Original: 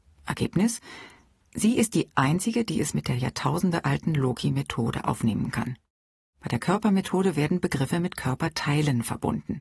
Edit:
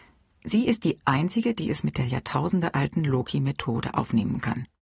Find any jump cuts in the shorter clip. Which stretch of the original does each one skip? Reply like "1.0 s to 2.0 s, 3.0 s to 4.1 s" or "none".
none